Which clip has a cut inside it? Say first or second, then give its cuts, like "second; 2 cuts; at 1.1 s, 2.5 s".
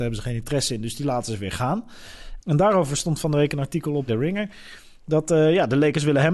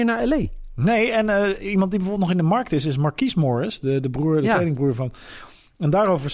first; 2 cuts; at 2.4 s, 4.1 s